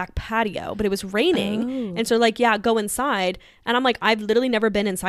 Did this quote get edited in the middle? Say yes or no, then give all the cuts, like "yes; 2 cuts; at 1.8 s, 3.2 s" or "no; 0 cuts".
no; 0 cuts